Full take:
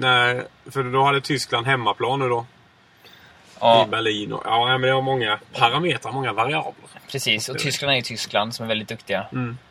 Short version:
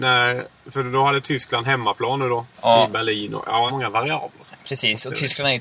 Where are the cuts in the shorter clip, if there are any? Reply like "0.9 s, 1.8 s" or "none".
2.5 s, 3.7 s